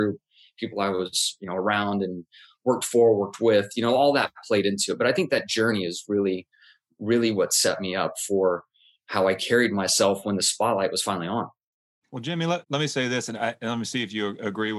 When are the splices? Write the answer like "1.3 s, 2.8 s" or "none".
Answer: none

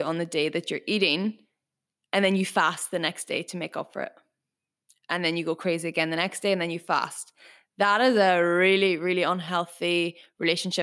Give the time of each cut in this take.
none

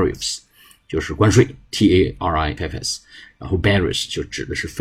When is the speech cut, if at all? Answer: 2.6 s

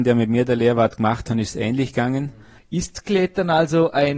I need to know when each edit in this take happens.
2.6 s

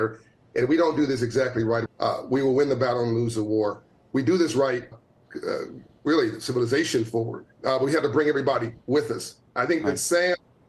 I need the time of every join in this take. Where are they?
1.9 s, 4.9 s, 7.5 s

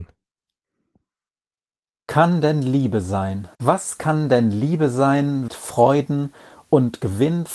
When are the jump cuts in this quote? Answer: 3.5 s, 5.5 s

